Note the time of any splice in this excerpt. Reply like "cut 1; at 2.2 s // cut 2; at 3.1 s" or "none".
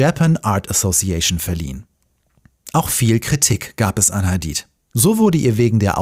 none